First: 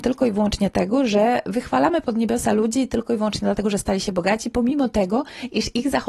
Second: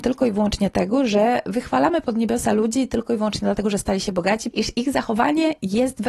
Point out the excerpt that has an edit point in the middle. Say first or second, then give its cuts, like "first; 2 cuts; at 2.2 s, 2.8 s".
second; 1 cut; at 4.5 s